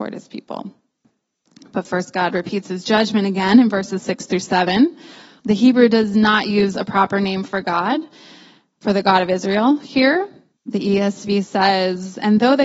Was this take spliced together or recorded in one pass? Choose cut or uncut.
cut